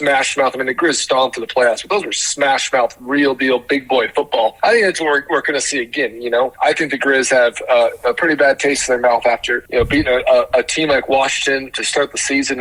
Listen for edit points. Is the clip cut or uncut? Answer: cut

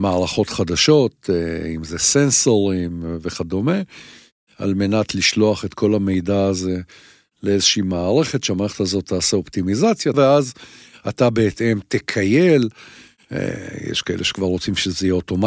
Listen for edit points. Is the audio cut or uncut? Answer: cut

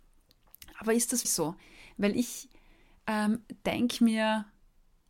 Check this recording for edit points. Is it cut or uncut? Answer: cut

